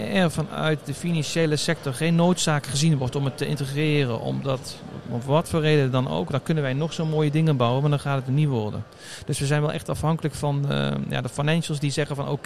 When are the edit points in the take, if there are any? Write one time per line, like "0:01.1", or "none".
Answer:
none